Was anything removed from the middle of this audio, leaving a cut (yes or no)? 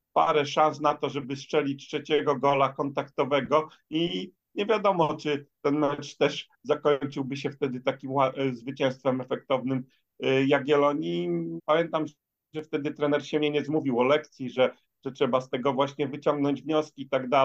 yes